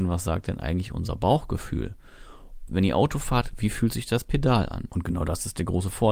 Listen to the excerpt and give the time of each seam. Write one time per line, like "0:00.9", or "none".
0:02.7
0:04.9